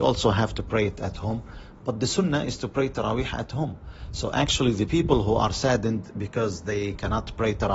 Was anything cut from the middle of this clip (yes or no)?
no